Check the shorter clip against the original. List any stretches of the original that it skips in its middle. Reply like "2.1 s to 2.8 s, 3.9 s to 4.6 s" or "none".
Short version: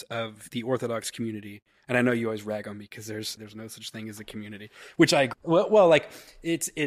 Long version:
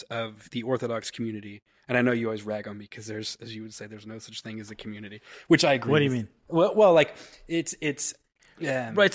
3.4 s to 3.9 s, 5.8 s to 6.4 s